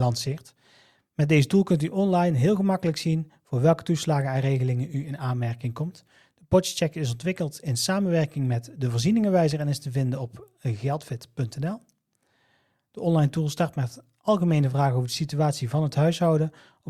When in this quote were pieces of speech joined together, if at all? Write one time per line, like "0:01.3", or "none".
none